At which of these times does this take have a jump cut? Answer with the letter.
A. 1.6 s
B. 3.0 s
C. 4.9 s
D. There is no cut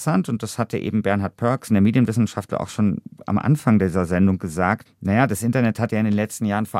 C